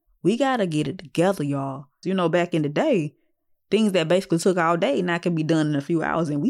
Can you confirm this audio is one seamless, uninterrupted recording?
no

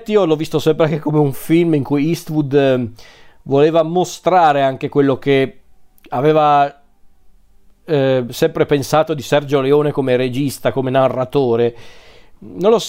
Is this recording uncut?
yes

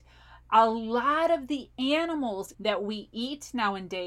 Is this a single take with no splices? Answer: no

